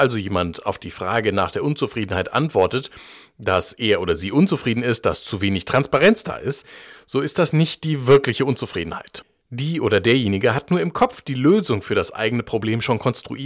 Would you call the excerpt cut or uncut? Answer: uncut